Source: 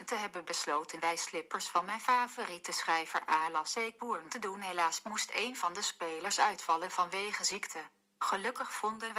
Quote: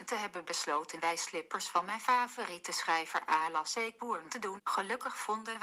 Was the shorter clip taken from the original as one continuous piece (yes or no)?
no